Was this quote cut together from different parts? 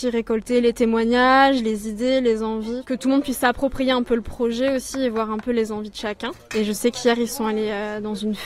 no; 0 cuts

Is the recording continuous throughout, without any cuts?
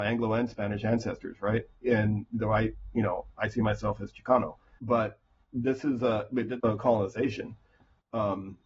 no; 2 cuts; at 4.8 s, 6.6 s

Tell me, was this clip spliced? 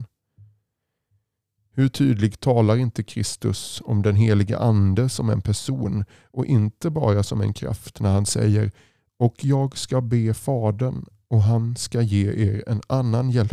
no; 0 cuts

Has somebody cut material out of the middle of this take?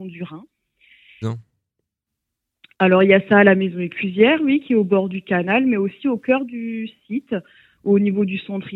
yes; 1 cut; at 1.2 s

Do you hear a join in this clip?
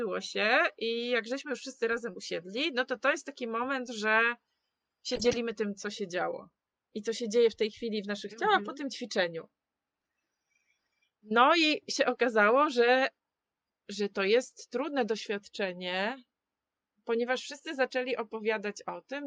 no; 0 cuts

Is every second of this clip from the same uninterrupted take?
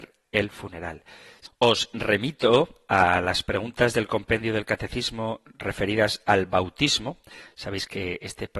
yes; 0 cuts

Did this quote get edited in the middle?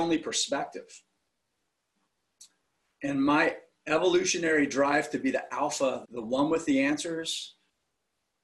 yes; 1 cut; at 6.0 s

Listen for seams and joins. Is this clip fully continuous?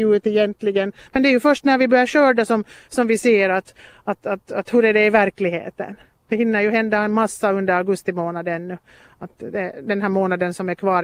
yes; 0 cuts

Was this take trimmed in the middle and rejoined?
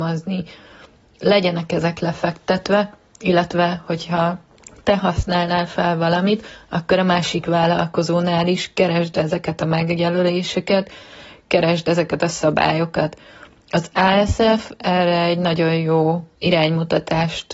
no; 0 cuts

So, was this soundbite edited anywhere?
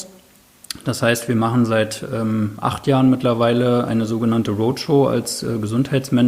no; 0 cuts

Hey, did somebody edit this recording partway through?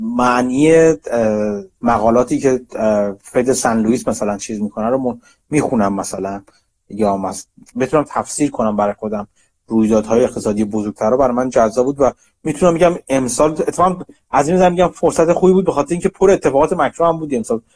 yes; 2 cuts; at 1.8 s, 7.7 s

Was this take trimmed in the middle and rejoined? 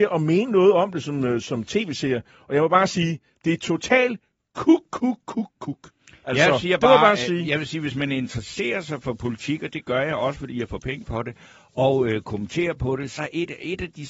yes; 1 cut; at 13.2 s

